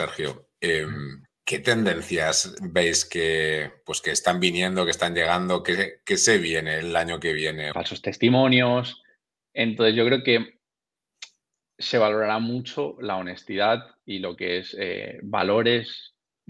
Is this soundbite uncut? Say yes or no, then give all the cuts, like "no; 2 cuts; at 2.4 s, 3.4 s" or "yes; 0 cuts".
no; 1 cut; at 7.7 s